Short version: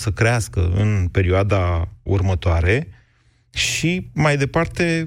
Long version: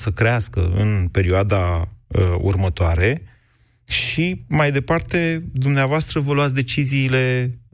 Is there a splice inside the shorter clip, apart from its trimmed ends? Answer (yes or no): yes